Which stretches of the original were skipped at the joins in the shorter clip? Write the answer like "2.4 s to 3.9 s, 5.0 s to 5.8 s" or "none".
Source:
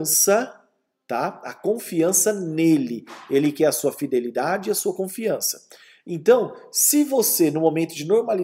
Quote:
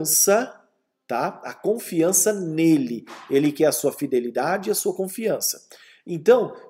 none